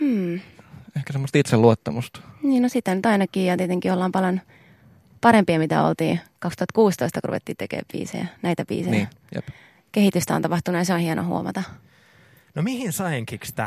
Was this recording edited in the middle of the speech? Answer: no; 0 cuts

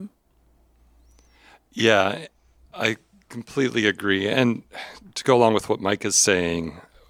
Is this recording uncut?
yes; 0 cuts

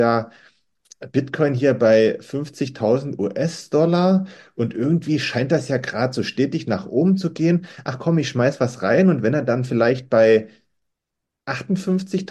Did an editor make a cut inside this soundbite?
no; 0 cuts

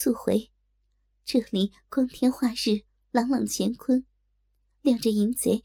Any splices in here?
no; 0 cuts

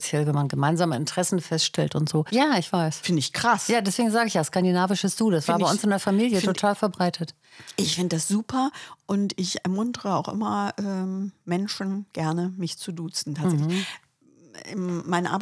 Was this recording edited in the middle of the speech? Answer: yes; 1 cut; at 2.3 s

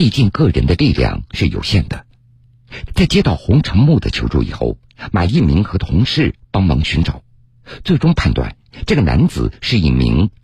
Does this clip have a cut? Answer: yes; 1 cut; at 2.9 s

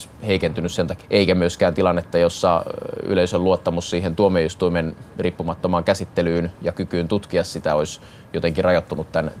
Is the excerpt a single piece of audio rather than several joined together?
no; 1 cut; at 1.0 s

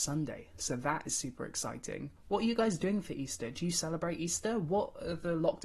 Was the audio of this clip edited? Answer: no; 0 cuts

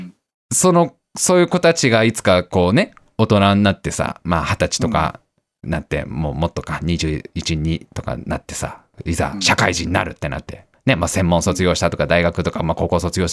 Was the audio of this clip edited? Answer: no; 0 cuts

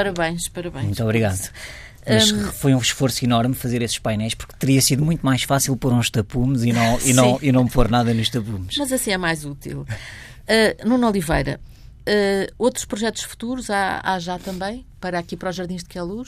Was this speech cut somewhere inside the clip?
no; 0 cuts

